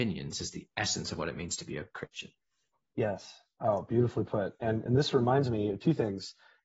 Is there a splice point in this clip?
no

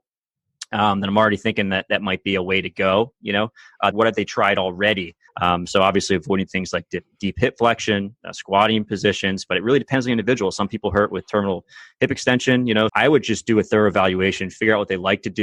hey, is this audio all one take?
no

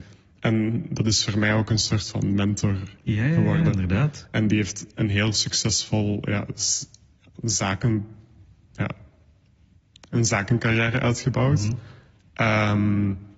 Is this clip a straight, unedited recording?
yes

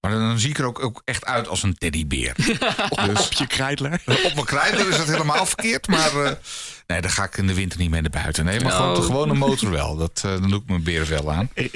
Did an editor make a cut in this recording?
no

